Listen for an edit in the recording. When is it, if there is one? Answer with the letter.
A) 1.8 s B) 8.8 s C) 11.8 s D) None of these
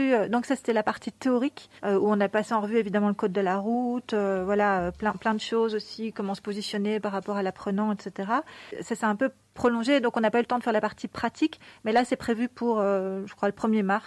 A